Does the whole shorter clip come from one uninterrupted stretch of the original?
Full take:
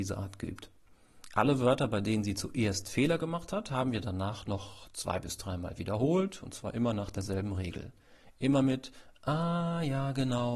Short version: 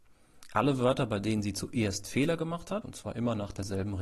no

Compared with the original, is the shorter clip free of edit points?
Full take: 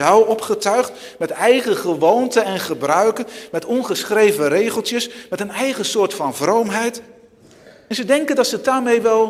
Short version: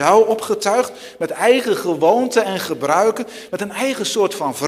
no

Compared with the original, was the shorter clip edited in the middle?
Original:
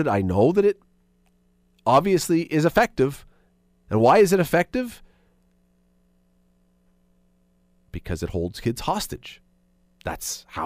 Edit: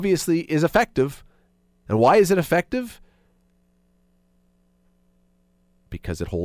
no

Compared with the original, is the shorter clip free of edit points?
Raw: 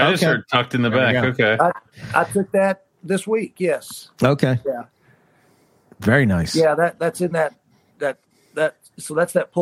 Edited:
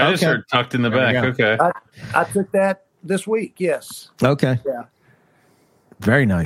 yes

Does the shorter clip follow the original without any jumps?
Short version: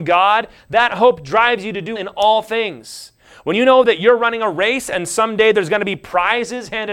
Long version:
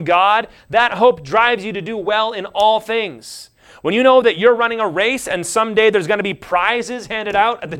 no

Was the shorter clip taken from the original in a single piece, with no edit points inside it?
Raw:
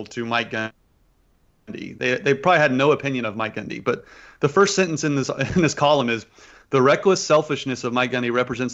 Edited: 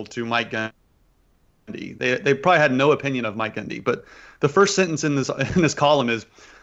yes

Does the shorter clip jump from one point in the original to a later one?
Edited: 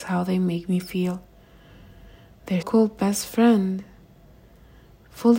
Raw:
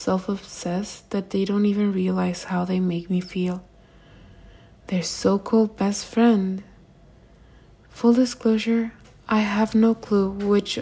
yes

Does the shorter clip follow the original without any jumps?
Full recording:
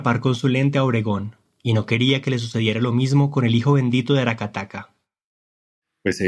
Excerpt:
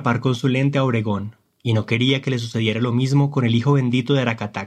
yes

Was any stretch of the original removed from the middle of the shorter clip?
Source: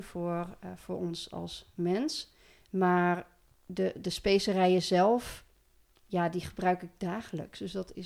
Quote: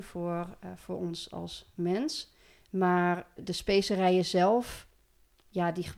yes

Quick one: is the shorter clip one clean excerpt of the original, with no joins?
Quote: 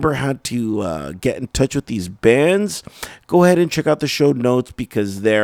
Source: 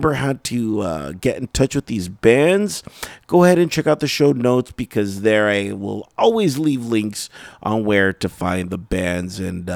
yes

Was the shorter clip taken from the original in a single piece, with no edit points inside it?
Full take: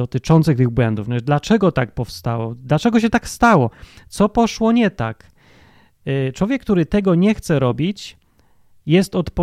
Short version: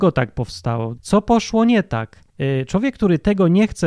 no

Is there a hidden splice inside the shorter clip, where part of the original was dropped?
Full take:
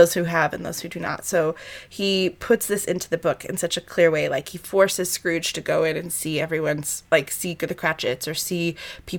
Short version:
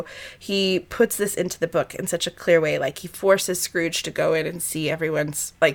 no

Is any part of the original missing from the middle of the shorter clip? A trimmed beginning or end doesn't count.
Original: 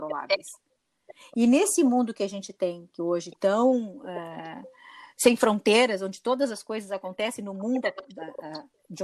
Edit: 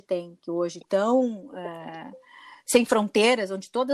no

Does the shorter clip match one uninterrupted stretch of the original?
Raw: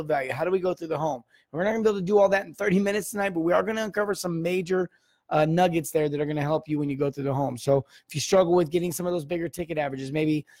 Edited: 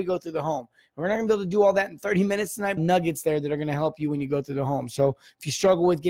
no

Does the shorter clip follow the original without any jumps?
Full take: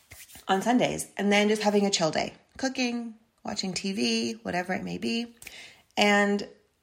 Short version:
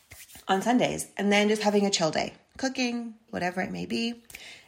no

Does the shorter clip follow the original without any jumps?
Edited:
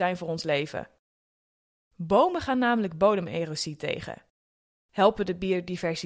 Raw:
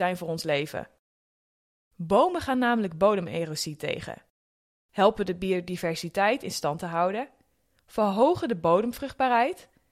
yes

